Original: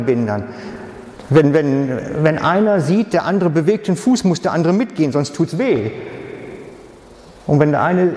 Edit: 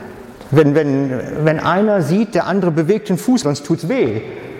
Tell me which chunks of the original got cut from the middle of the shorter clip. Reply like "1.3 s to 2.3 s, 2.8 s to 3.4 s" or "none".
4.2 s to 5.1 s